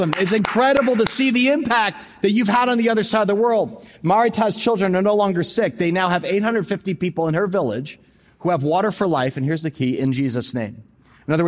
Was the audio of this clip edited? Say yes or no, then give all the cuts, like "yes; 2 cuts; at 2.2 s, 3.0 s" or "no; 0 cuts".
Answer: no; 0 cuts